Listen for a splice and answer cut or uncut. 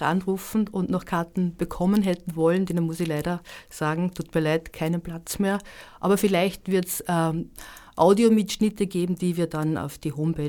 uncut